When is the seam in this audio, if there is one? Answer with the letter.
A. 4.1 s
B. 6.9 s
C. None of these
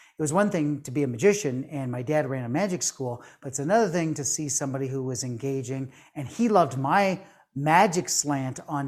C